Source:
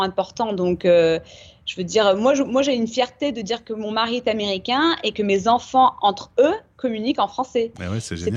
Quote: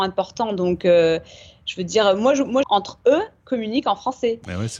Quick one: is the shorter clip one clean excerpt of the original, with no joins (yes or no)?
no